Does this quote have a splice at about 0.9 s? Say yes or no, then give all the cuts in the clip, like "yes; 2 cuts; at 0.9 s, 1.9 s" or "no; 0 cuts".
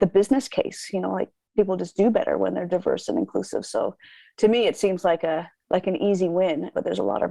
no; 1 cut; at 5.6 s